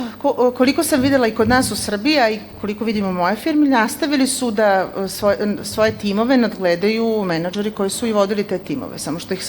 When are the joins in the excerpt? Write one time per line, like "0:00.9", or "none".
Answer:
none